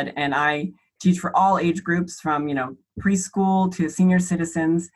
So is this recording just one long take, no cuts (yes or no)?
yes